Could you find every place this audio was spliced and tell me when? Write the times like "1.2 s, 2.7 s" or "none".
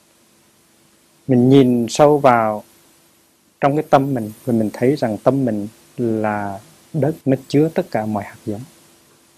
7.2 s